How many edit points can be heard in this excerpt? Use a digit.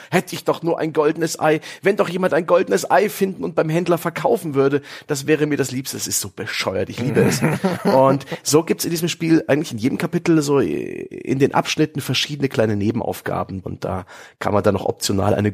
1